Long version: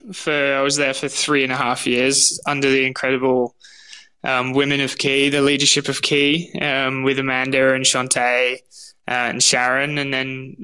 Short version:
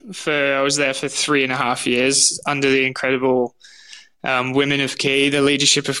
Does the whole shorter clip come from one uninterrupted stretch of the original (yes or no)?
yes